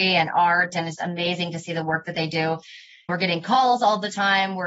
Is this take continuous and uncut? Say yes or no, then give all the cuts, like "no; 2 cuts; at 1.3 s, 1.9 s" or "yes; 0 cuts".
no; 2 cuts; at 1.0 s, 3.1 s